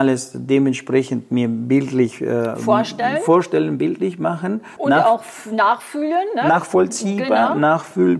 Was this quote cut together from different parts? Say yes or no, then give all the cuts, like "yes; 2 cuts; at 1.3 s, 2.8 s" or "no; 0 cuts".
no; 0 cuts